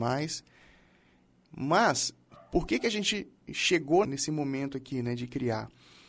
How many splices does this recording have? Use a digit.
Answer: 1